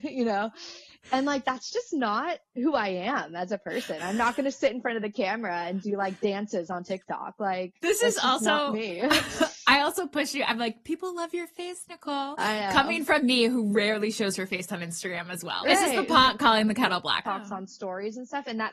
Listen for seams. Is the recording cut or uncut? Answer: cut